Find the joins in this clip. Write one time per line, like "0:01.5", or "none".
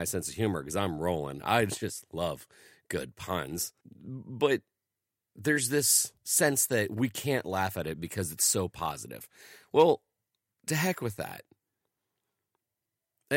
0:03.8